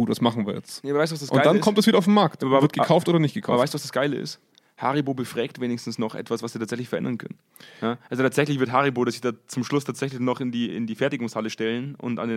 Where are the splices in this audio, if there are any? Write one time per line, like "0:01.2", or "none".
0:10.7